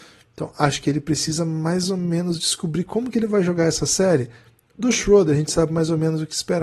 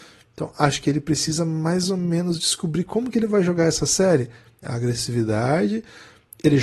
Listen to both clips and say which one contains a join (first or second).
second